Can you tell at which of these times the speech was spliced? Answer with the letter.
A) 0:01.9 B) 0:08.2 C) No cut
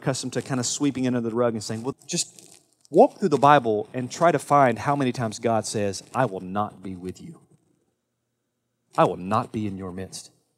A